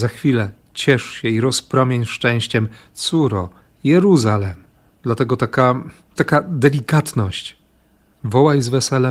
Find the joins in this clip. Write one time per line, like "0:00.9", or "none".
0:04.9
0:06.2